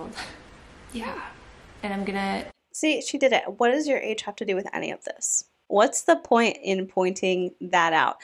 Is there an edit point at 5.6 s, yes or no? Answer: no